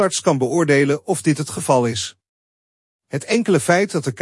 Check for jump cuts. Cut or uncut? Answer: uncut